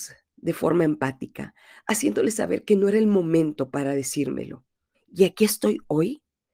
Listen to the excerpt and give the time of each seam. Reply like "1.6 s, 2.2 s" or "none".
4.9 s